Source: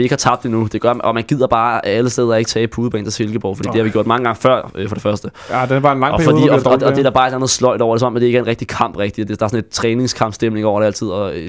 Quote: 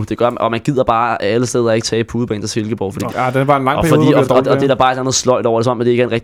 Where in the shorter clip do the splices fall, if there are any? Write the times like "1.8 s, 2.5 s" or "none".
3.1 s